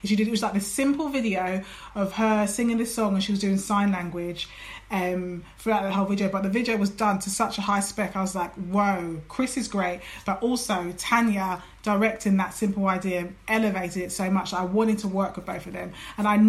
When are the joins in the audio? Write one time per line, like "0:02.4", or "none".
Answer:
none